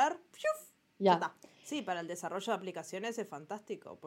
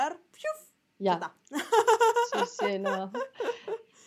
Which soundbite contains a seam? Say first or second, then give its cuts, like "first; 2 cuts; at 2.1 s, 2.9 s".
first; 1 cut; at 1.4 s